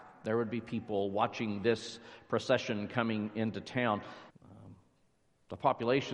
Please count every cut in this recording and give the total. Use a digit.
1